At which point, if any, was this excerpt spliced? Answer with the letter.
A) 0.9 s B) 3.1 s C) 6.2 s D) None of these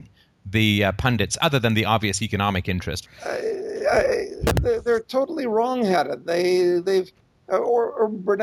B